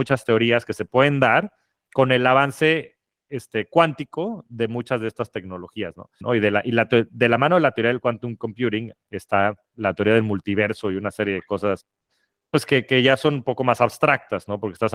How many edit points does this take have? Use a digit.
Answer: 1